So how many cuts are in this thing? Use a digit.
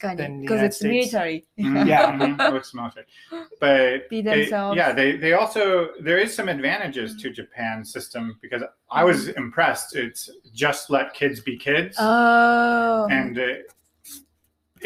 2